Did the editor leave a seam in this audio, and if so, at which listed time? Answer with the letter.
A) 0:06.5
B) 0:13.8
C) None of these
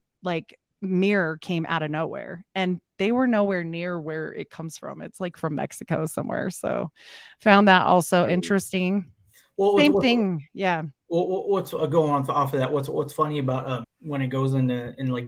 B